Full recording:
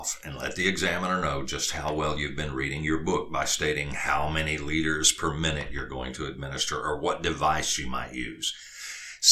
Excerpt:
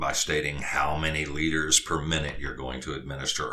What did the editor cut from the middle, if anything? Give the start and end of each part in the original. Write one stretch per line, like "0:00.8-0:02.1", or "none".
none